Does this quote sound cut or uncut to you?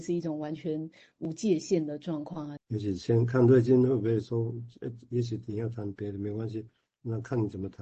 cut